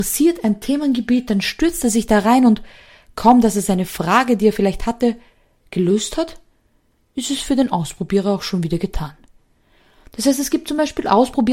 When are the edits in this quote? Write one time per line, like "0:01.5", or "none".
none